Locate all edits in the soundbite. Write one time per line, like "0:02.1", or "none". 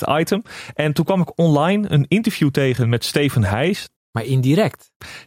0:04.0